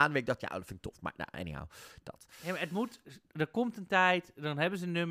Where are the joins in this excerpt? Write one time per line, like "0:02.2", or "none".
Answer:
none